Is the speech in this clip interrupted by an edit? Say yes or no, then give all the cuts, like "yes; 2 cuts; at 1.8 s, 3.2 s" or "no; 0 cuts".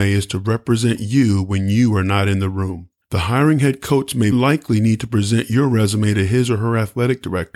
yes; 2 cuts; at 3.0 s, 4.3 s